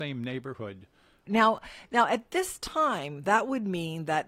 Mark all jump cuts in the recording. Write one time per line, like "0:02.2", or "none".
0:01.3
0:03.2